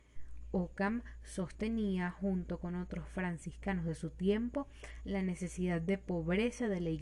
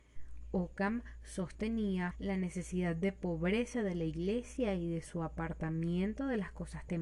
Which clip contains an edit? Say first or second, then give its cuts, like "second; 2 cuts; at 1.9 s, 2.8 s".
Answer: second; 1 cut; at 2.1 s